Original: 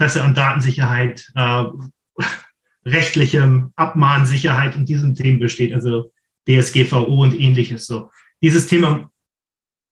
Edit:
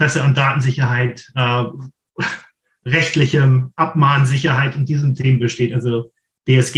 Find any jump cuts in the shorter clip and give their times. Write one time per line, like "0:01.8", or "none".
none